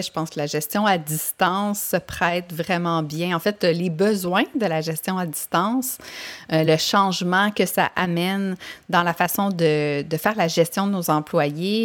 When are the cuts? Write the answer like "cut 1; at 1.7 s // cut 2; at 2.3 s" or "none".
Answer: none